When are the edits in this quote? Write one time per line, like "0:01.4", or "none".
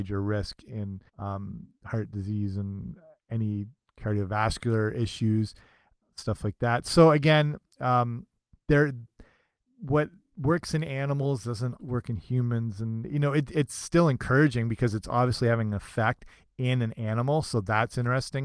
0:01.1
0:11.8